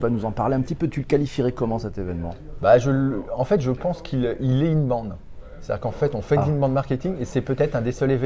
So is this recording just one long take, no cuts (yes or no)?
yes